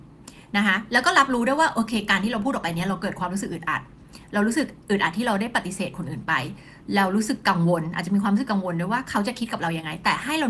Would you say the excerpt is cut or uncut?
uncut